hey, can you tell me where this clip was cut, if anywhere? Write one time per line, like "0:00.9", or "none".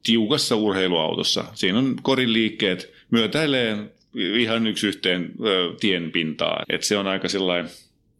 0:06.6